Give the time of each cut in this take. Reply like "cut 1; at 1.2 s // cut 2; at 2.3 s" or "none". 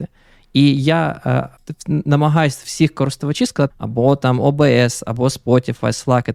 cut 1; at 1.6 s // cut 2; at 3.7 s